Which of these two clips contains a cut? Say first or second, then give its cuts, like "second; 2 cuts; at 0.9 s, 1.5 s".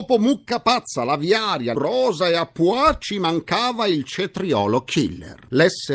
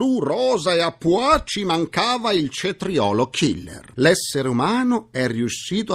first; 1 cut; at 1.8 s